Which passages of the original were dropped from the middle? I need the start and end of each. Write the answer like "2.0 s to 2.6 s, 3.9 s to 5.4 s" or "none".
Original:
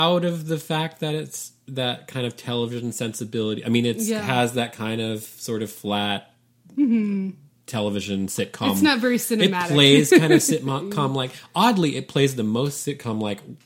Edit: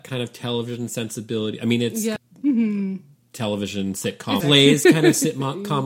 4.2 s to 6.5 s, 8.7 s to 9.7 s